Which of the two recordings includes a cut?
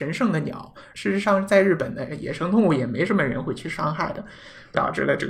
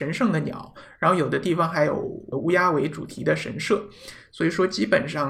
first; 1 cut; at 0.9 s

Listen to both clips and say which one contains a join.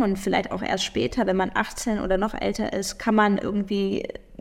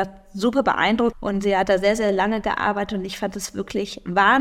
second; 1 cut; at 1.1 s

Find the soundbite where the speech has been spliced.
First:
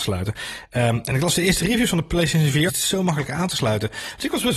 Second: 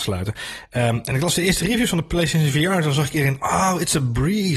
first; 1 cut; at 2.7 s

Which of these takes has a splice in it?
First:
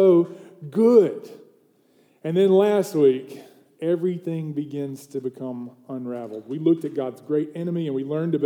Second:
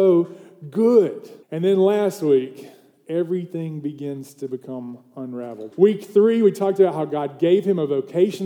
second; 2 cuts; at 1.4 s, 5.7 s

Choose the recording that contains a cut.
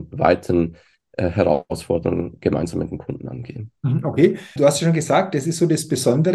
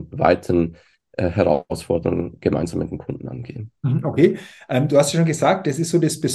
first; 1 cut; at 4.6 s

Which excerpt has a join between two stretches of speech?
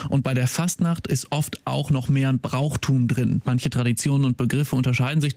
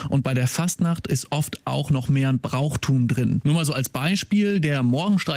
second; 1 cut; at 3.4 s

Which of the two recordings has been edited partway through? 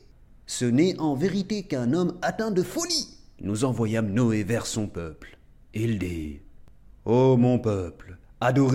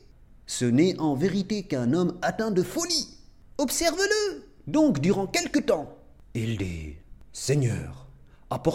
first; 1 cut; at 3.4 s

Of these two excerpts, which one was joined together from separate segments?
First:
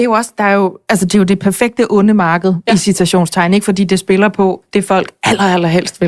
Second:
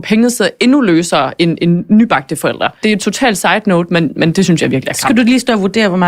second; 1 cut; at 2.8 s

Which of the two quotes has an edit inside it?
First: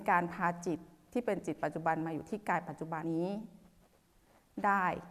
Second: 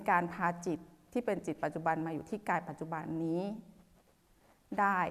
first; 1 cut; at 3.0 s

